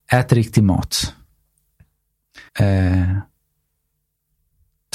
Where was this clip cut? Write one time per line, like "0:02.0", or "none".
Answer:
0:02.5